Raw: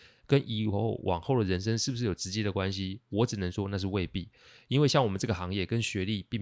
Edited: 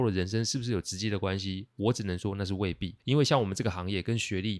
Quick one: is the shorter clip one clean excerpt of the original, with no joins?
no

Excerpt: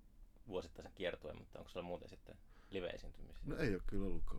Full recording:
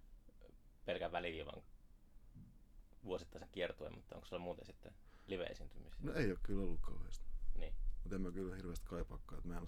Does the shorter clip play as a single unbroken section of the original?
yes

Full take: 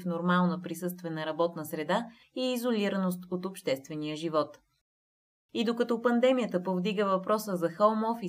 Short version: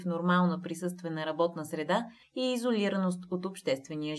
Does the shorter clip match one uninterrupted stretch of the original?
yes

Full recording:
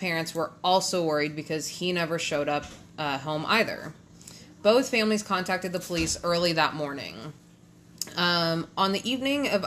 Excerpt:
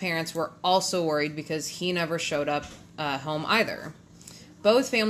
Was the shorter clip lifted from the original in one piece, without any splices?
yes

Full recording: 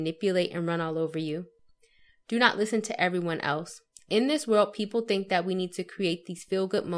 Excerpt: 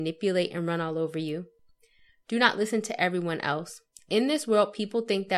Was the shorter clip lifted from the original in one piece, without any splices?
yes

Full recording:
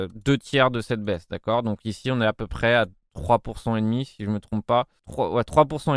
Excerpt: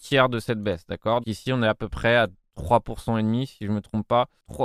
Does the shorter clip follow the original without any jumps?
no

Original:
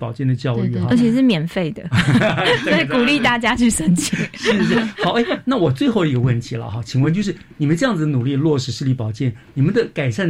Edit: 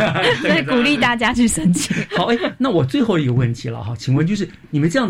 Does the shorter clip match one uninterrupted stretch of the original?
no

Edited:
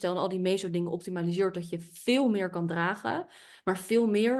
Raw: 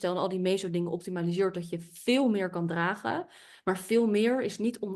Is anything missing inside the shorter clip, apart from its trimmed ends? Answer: no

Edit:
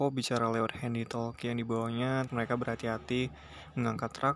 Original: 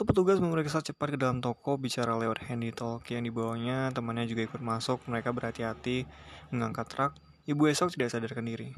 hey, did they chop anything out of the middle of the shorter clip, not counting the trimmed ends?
yes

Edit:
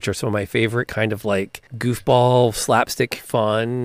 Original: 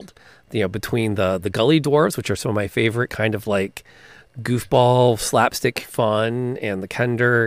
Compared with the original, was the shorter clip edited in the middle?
yes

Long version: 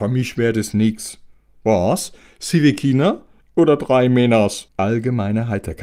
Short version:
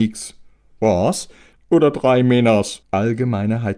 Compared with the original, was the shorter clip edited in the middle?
yes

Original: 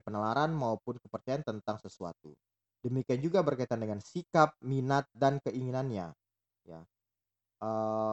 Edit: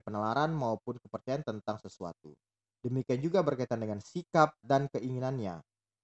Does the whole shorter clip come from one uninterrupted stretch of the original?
no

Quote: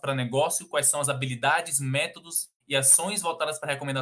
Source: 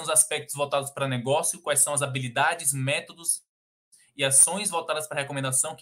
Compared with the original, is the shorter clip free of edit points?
no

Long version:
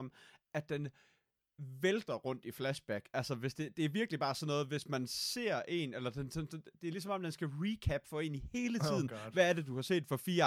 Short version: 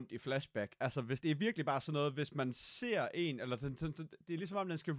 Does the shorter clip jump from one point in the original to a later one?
yes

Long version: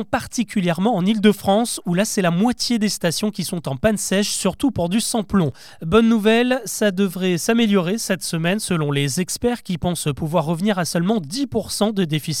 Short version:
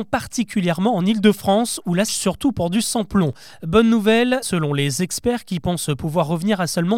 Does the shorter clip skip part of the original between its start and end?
yes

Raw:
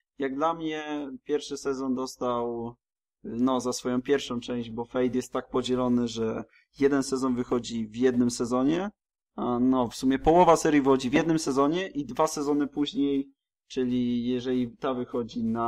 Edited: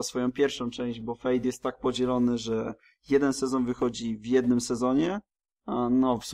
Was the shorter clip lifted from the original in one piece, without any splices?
yes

